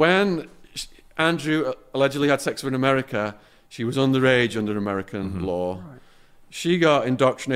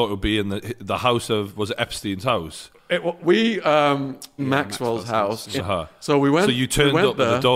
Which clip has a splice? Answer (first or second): second